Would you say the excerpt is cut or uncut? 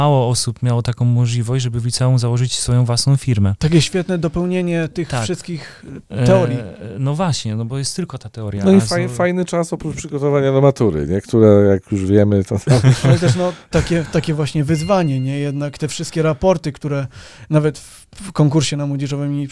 uncut